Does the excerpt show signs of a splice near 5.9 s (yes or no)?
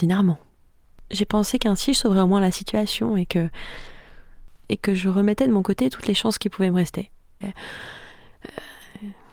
no